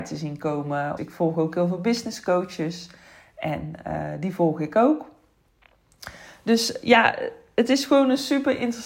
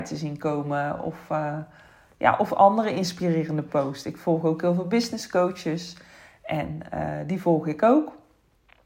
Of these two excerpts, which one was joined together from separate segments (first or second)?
first